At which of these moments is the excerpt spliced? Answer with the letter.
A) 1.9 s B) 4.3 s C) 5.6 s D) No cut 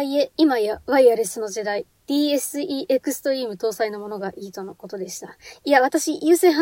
A